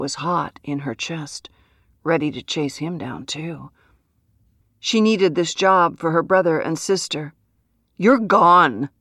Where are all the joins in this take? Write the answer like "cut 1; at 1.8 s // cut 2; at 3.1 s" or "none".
cut 1; at 4.6 s